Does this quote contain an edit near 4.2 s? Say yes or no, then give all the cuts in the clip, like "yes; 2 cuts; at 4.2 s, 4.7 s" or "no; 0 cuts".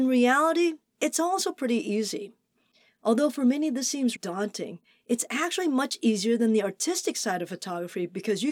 yes; 1 cut; at 4.2 s